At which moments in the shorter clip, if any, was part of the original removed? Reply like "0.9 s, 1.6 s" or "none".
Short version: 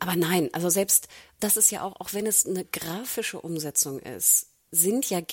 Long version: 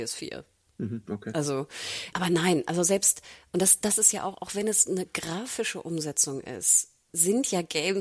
1.4 s